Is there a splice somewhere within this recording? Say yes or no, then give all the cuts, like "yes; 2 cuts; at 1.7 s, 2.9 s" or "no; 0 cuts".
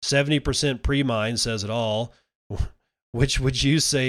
no; 0 cuts